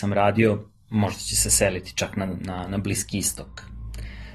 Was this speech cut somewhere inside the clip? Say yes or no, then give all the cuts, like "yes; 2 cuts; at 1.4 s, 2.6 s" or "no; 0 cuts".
no; 0 cuts